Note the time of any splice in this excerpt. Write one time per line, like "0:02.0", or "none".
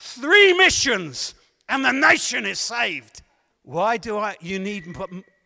0:03.5